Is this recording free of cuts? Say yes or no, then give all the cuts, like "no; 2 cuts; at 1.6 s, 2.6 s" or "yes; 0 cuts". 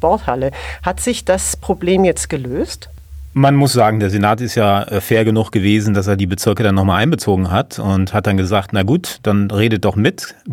yes; 0 cuts